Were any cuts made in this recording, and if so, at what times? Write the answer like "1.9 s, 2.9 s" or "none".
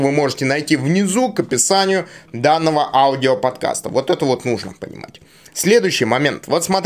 none